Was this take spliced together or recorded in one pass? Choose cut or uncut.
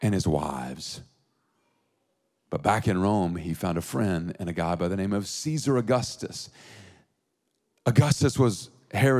uncut